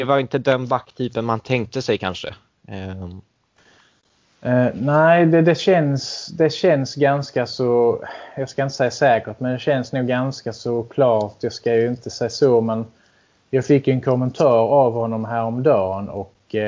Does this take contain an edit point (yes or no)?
no